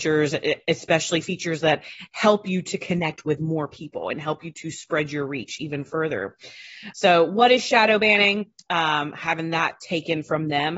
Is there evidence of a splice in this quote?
yes; 2 cuts; at 6.9 s, 8.6 s

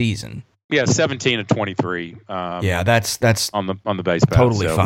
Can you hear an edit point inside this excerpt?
no; 0 cuts

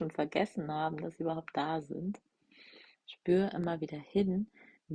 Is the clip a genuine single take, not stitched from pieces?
no; 1 cut; at 2.9 s

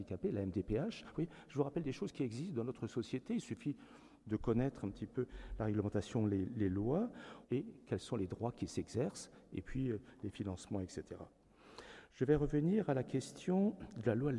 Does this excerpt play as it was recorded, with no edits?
no; 1 cut; at 7.4 s

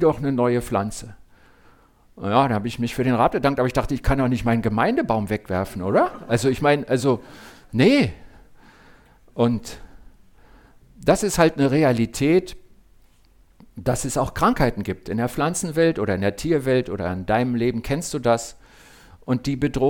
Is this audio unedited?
yes; 0 cuts

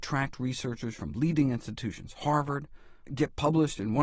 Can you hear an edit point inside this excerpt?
yes; 1 cut; at 3.1 s

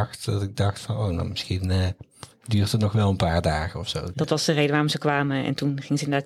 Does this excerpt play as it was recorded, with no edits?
no; 1 cut; at 4.1 s

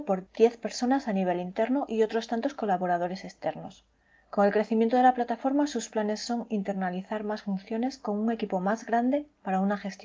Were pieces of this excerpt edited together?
no; 0 cuts

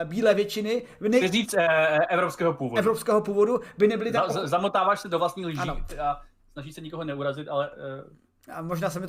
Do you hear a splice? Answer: no; 0 cuts

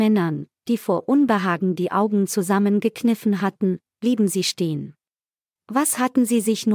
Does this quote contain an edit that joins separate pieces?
yes; 1 cut; at 5.6 s

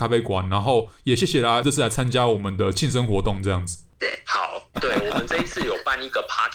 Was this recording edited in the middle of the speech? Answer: yes; 1 cut; at 4.7 s

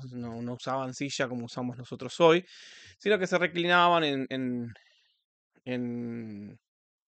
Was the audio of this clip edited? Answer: no; 0 cuts

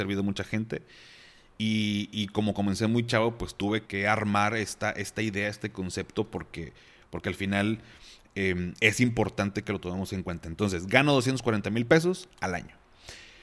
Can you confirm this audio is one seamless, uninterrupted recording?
no; 1 cut; at 3.9 s

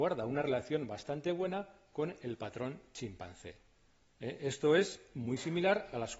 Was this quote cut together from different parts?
no; 0 cuts

